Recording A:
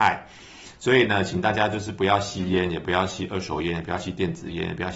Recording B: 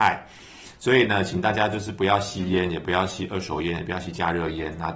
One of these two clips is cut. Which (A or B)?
B